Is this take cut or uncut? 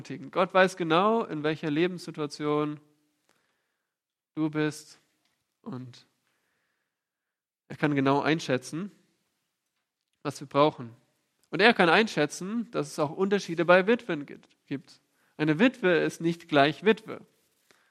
uncut